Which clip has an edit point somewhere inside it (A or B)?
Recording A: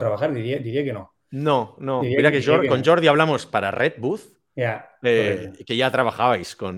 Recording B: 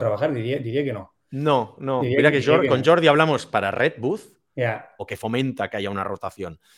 B